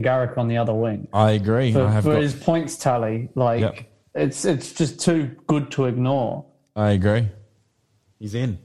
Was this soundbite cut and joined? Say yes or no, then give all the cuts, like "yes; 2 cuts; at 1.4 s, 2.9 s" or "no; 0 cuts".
no; 0 cuts